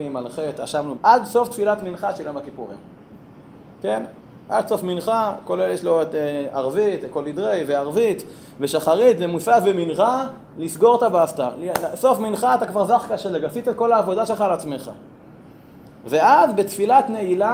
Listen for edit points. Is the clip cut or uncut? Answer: cut